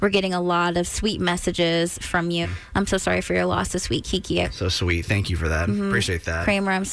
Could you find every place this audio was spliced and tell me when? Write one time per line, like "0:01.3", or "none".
0:02.4
0:04.4